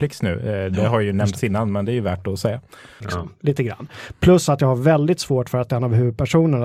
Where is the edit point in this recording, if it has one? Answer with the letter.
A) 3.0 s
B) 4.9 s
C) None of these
A